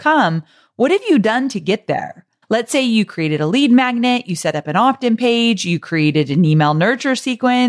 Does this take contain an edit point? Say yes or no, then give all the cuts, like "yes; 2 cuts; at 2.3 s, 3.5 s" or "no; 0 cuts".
yes; 1 cut; at 2.4 s